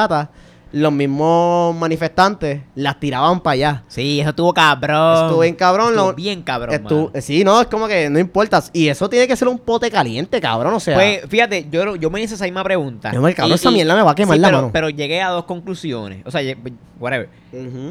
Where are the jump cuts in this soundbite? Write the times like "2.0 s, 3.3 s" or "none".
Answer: 14.9 s